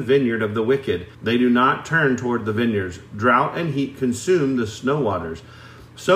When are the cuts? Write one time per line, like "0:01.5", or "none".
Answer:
0:01.1